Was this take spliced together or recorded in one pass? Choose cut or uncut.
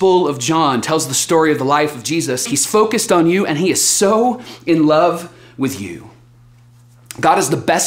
cut